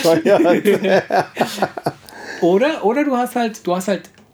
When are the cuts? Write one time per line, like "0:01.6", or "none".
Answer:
none